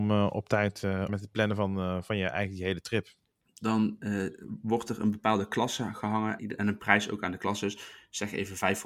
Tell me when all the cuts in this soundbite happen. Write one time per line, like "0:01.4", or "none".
0:01.1
0:03.4
0:06.4

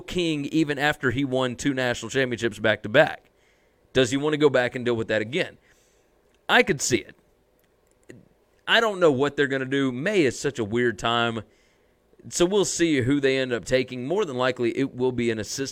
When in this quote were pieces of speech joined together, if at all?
none

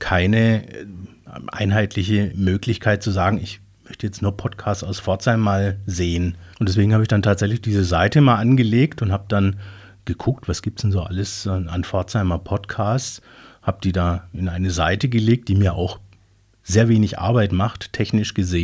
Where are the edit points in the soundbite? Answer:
0:06.5

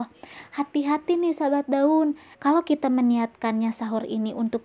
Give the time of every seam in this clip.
0:02.3

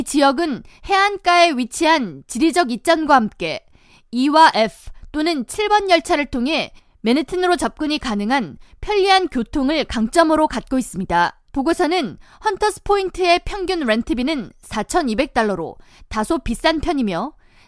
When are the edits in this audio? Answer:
0:11.5

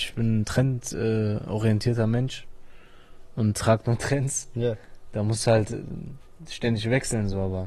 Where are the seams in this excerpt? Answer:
none

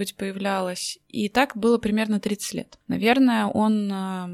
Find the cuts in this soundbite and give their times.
0:02.8

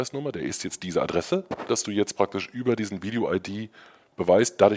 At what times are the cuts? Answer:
0:01.7

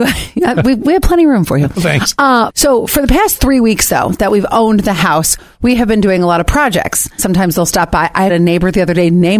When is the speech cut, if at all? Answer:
0:02.5
0:07.2
0:08.3

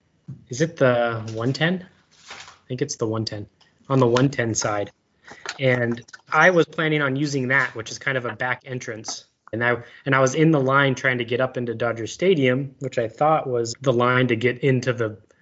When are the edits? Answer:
0:09.5
0:13.7

